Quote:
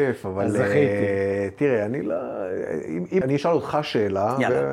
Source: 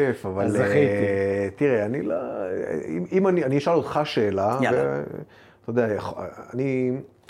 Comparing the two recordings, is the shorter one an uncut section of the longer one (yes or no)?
no